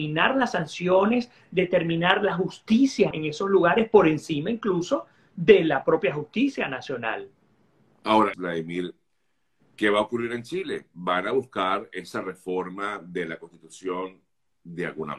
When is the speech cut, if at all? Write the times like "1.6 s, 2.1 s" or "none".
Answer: 3.1 s, 8.3 s